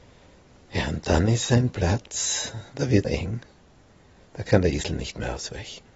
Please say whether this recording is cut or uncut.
cut